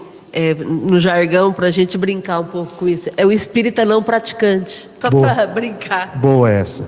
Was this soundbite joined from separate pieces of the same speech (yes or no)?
yes